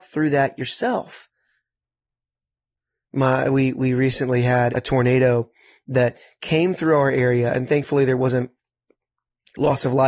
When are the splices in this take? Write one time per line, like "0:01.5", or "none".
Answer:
0:04.7